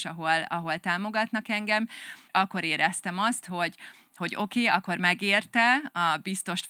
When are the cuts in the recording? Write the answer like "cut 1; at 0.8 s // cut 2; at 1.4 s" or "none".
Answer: cut 1; at 2.3 s